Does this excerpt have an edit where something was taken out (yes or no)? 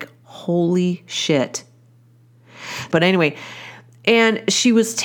yes